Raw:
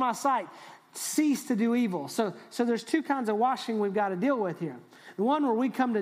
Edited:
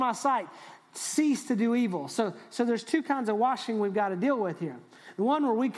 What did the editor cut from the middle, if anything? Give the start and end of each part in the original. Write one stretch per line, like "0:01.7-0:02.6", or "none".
none